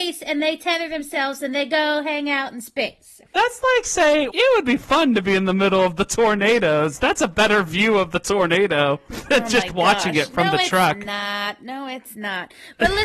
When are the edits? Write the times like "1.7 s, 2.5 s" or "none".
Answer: 4.3 s